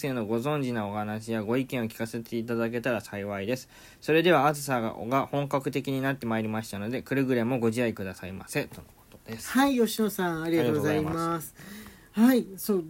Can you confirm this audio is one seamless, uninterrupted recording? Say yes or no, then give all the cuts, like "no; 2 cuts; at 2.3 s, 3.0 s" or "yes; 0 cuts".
yes; 0 cuts